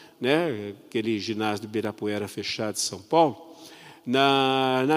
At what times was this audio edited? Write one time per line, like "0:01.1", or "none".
none